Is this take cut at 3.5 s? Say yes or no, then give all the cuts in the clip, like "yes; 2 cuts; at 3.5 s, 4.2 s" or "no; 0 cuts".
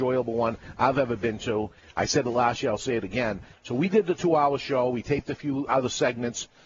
yes; 1 cut; at 3.5 s